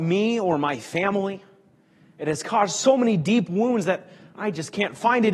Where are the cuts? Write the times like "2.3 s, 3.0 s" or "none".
none